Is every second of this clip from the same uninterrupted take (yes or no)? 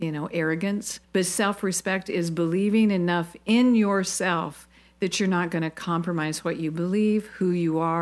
no